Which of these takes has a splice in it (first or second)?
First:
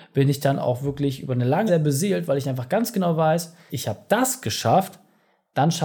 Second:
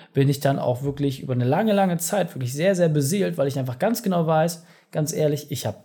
first